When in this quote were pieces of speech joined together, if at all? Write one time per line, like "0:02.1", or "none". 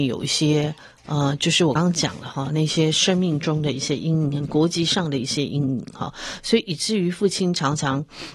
0:01.8